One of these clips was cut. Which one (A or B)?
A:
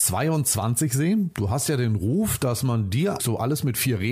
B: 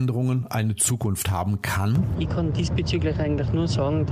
A